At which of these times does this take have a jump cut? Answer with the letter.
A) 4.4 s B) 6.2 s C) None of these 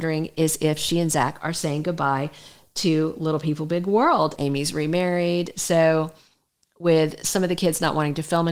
A